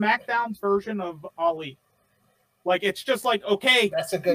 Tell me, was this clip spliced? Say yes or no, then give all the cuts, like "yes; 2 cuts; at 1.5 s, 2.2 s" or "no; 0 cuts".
no; 0 cuts